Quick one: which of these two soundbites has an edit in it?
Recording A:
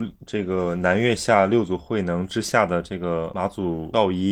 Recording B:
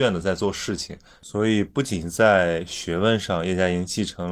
B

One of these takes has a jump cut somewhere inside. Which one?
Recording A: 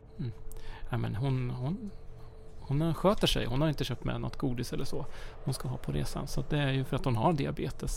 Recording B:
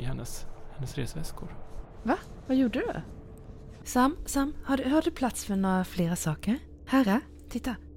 B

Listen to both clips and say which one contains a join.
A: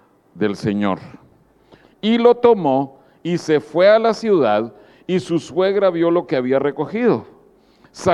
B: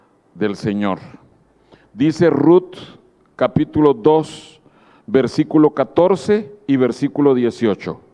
A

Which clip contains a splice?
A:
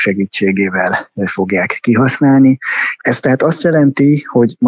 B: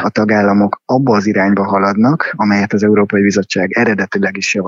A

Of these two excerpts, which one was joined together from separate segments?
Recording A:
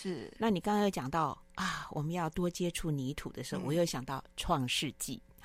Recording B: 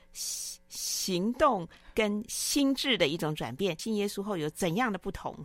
B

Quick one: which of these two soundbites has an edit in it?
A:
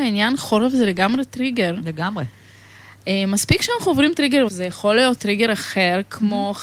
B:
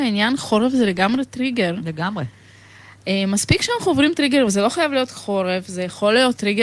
A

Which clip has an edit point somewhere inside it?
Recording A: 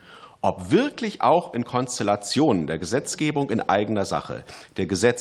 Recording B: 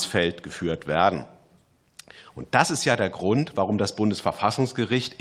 B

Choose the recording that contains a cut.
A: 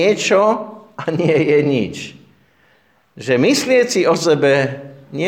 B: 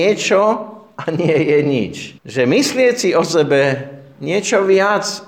B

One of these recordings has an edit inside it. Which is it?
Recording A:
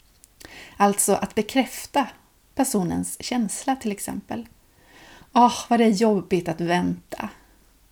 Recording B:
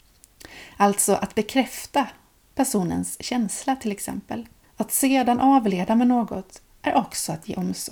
B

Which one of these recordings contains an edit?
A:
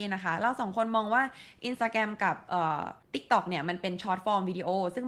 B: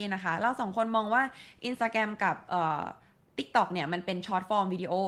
A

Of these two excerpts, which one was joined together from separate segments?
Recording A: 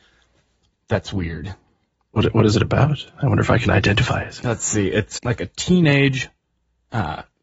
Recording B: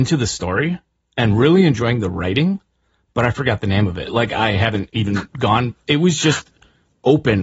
A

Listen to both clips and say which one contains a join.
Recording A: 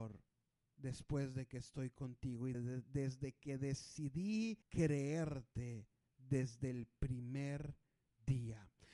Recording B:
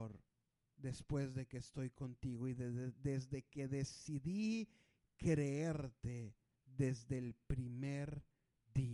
A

